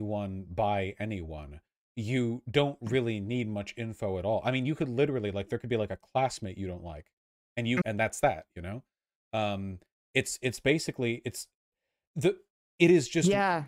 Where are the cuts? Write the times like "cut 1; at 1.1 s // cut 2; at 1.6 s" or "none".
cut 1; at 7.8 s